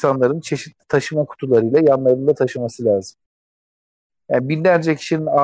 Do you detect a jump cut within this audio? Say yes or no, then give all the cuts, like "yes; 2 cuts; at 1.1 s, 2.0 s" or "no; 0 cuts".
no; 0 cuts